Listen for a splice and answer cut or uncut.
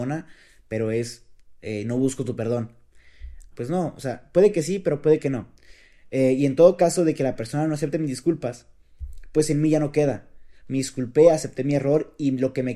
cut